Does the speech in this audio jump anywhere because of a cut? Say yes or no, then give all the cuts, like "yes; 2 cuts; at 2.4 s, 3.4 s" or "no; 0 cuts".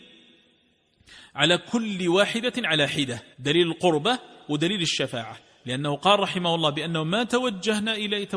yes; 1 cut; at 3.3 s